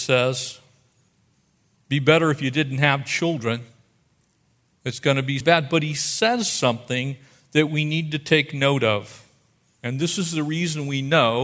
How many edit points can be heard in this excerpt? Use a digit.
1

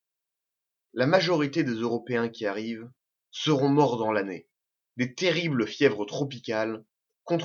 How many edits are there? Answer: 0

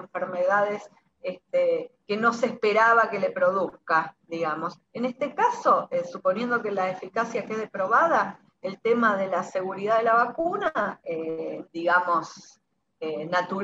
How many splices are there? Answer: 2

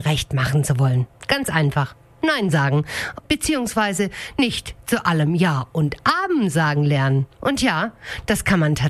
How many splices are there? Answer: 1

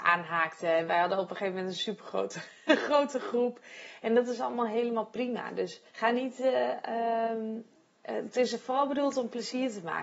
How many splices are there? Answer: 1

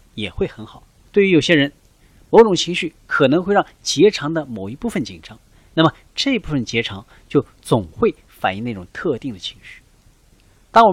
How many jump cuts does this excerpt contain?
1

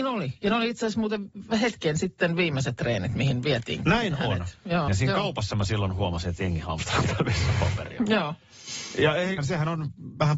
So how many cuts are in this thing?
2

